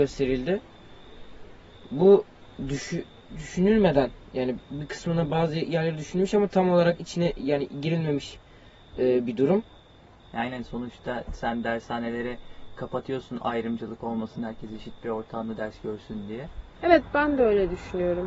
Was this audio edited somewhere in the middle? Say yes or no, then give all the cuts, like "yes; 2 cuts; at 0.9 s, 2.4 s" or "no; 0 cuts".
yes; 1 cut; at 16.8 s